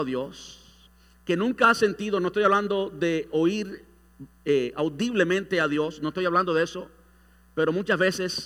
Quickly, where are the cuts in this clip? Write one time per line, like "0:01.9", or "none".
none